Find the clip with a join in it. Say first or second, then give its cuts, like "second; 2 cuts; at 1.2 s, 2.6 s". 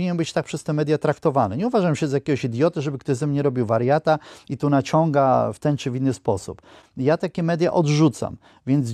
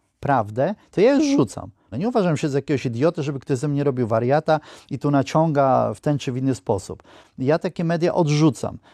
second; 1 cut; at 1.9 s